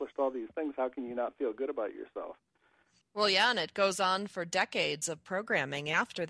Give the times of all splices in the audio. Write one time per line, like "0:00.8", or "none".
0:03.0